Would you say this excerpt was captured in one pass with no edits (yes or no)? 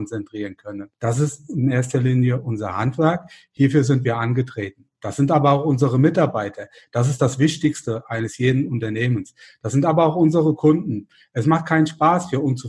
no